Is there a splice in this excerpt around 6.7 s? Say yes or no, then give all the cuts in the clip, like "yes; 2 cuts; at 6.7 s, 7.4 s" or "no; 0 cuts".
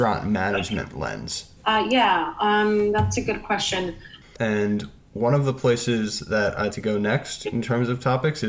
yes; 3 cuts; at 1.6 s, 4.2 s, 6.7 s